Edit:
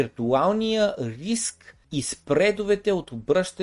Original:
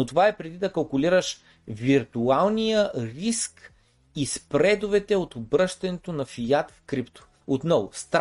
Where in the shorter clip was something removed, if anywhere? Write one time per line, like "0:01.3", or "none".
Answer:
0:01.8